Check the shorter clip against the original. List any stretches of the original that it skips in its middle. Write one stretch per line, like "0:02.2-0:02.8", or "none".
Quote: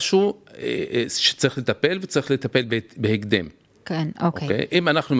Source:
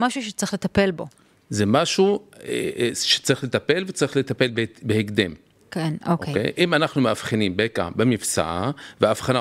none